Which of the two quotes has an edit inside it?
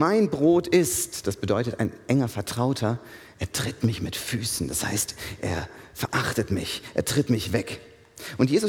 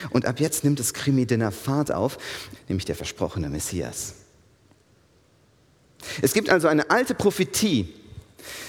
second; 1 cut; at 2.6 s

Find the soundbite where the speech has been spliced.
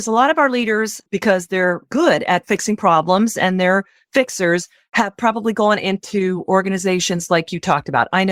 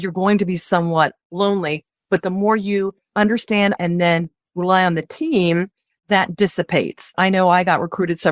second; 2 cuts; at 3.8 s, 7.1 s

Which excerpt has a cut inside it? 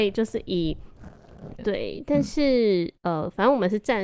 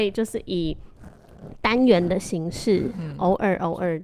first; 1 cut; at 1.6 s

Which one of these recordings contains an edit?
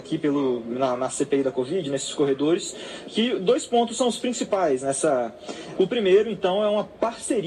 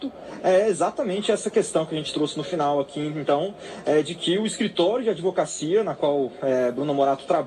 first; 1 cut; at 5.8 s

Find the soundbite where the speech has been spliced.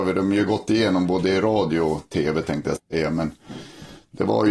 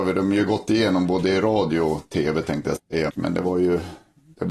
second; 1 cut; at 3.1 s

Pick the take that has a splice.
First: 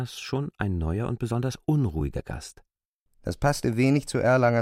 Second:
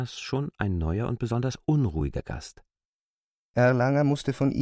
first; 1 cut; at 3.1 s

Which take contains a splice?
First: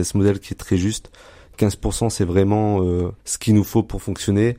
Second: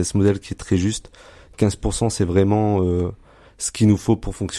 first; 1 cut; at 3.2 s

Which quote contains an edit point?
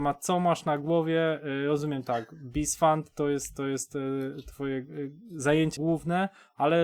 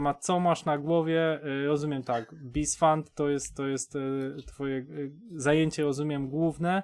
first; 1 cut; at 5.8 s

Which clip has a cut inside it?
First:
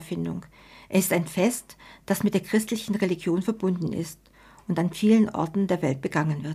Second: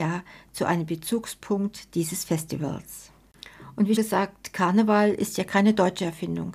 second; 1 cut; at 4.0 s

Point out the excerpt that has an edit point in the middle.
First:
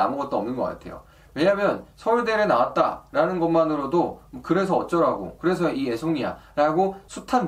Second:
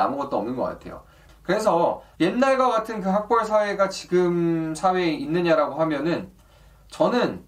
second; 1 cut; at 1.3 s

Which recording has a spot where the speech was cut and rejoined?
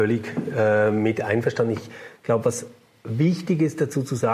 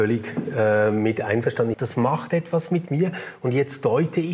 second; 1 cut; at 1.7 s

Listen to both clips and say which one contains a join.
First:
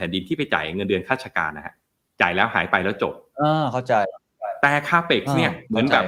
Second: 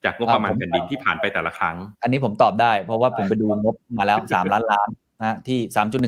second; 1 cut; at 1.9 s

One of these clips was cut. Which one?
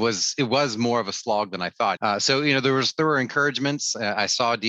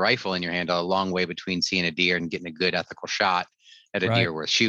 first; 1 cut; at 2.0 s

